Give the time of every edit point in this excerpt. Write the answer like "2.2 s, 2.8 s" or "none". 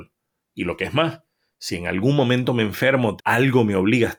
3.2 s